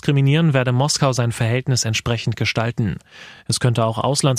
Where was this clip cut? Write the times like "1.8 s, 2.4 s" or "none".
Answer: none